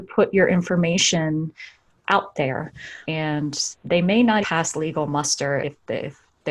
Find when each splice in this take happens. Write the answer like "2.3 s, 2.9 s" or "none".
3.0 s, 4.4 s, 5.6 s